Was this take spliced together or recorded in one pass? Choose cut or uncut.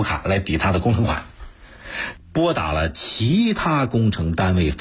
cut